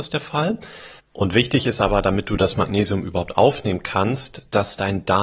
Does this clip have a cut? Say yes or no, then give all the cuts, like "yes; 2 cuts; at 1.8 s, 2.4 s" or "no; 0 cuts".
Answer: yes; 1 cut; at 1.0 s